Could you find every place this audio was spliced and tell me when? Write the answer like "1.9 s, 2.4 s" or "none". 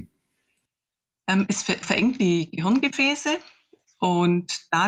1.8 s